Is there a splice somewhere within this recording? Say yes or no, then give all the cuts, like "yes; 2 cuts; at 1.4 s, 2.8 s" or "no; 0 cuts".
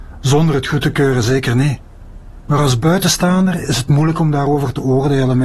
no; 0 cuts